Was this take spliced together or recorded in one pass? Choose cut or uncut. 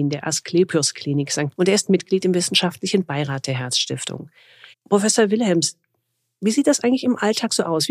cut